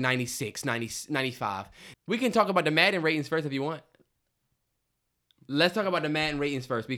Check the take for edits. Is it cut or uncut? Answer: cut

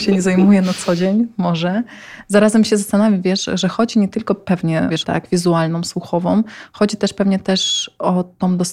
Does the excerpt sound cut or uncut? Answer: cut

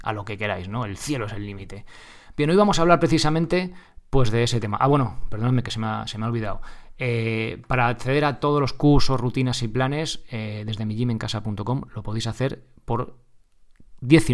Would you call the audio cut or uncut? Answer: uncut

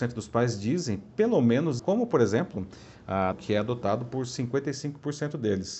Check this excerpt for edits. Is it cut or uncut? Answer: cut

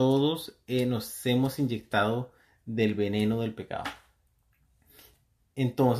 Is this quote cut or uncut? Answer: uncut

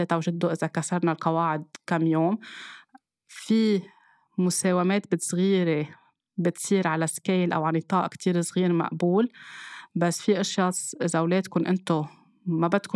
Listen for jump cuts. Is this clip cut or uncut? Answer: uncut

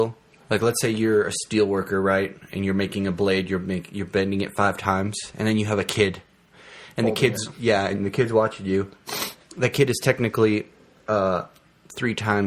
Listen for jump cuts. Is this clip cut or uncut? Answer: uncut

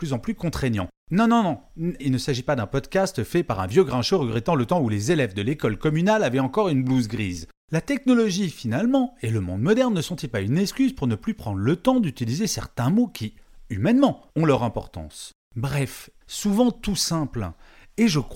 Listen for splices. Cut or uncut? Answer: cut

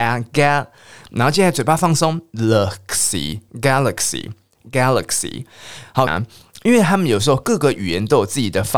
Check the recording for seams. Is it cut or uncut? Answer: cut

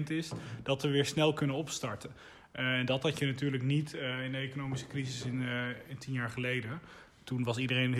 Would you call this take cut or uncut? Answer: uncut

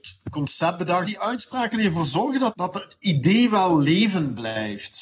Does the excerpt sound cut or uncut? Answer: cut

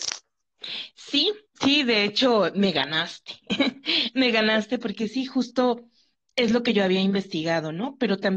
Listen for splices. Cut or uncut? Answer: uncut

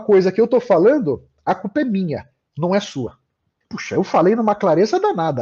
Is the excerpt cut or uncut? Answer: cut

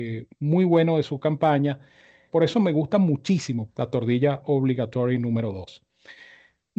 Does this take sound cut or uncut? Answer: cut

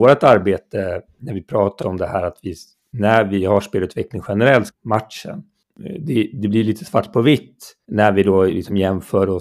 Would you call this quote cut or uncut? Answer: cut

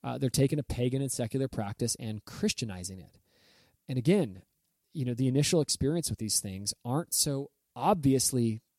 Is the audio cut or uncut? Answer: cut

